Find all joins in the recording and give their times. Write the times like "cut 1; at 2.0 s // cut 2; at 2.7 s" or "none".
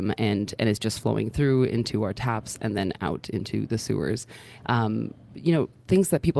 cut 1; at 4.6 s